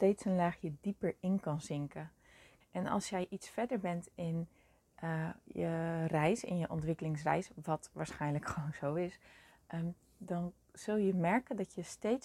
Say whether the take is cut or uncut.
cut